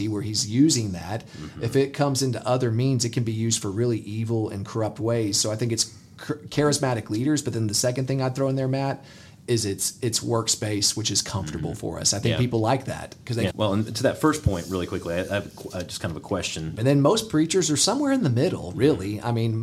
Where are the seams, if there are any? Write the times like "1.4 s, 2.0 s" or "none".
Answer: 13.5 s, 16.8 s